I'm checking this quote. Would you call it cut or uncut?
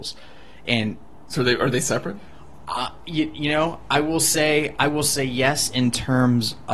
uncut